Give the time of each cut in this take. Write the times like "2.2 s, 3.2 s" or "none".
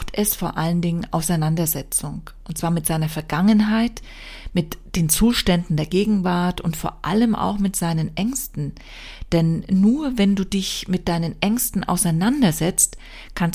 none